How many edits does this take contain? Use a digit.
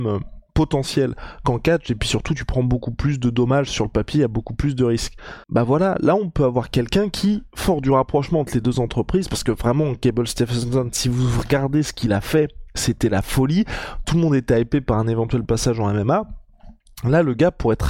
1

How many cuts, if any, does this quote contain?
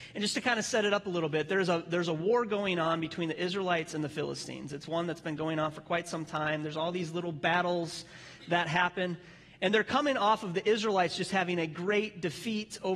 0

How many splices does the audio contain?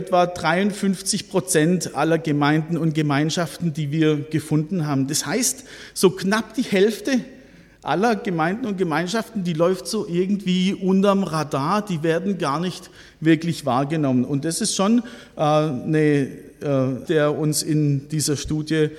1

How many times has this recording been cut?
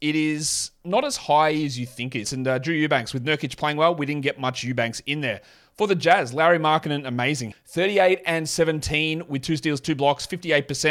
2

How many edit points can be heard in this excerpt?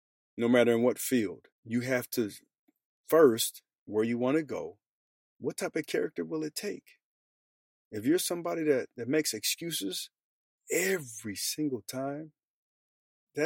2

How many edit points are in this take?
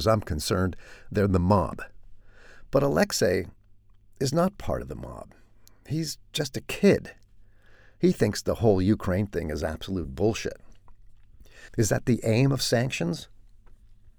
1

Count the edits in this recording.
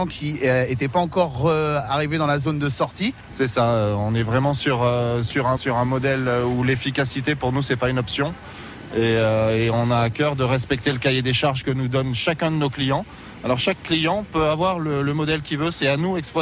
2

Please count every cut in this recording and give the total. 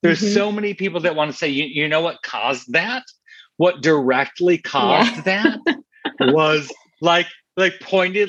0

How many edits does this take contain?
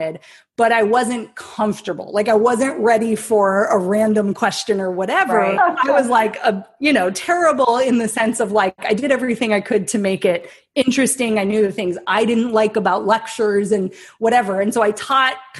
1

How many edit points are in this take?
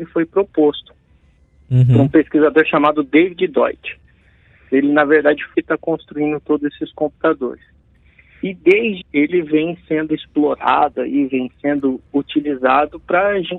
2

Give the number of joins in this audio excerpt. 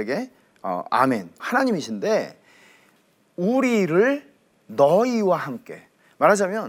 1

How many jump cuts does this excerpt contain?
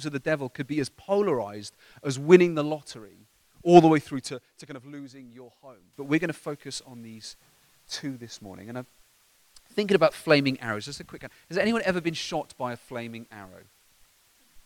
1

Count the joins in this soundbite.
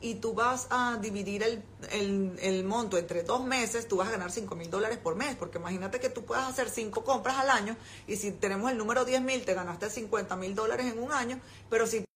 1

